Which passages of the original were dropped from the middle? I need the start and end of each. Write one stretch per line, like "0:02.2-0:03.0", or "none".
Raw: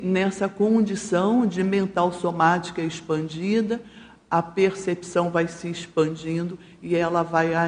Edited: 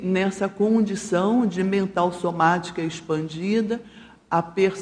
none